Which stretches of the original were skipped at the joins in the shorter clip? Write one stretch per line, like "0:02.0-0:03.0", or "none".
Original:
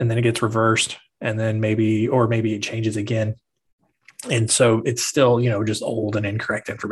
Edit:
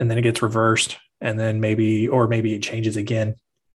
none